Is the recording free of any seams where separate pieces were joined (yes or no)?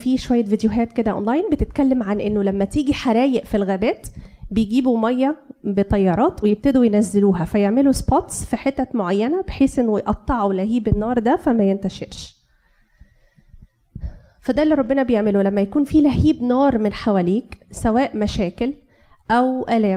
yes